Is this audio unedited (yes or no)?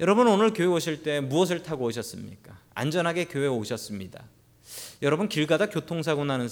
yes